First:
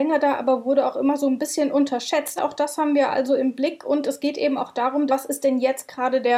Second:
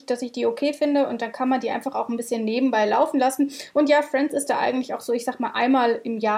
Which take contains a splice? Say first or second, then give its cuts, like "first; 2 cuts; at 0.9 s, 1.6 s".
first; 2 cuts; at 2.4 s, 5.1 s